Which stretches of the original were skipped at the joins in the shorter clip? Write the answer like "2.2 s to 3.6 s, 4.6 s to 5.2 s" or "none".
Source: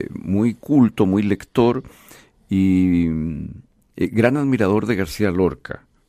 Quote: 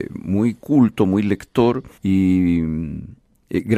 2.0 s to 2.4 s